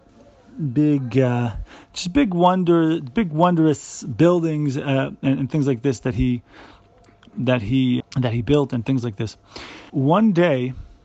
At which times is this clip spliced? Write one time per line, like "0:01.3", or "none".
0:08.0
0:09.9